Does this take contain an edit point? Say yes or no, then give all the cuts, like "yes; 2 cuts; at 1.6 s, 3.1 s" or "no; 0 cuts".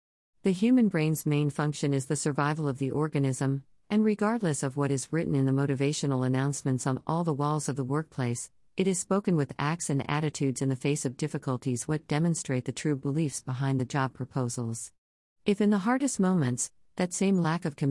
yes; 2 cuts; at 8.6 s, 16.9 s